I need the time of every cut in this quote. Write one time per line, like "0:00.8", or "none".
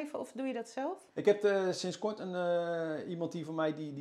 0:01.1